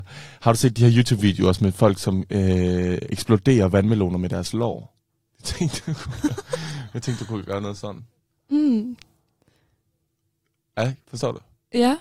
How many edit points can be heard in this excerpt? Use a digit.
1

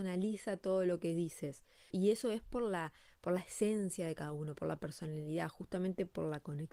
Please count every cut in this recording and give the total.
1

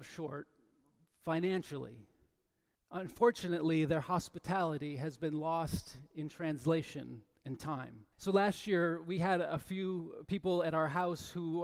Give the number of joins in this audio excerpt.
2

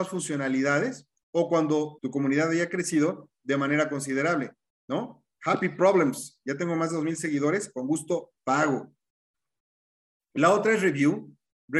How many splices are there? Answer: 1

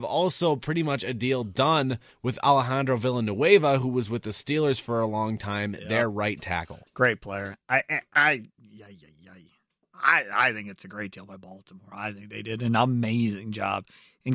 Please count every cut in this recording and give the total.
0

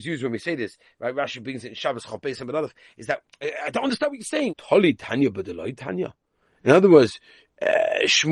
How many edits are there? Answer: 1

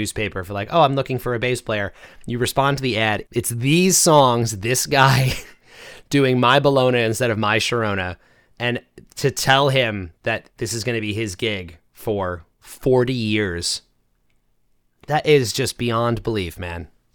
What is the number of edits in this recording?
1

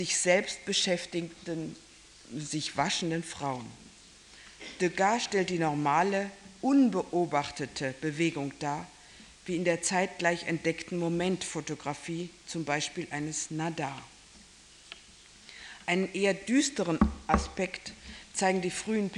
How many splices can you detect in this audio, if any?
0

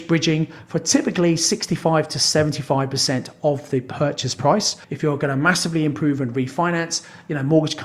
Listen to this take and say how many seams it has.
1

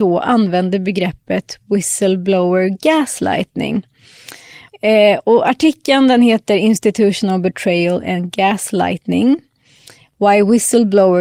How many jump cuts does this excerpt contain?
1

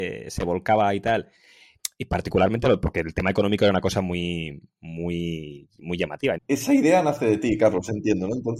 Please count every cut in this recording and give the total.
1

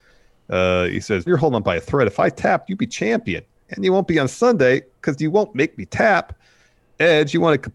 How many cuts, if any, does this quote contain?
2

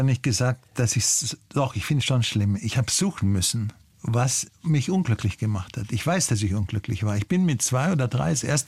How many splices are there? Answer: 0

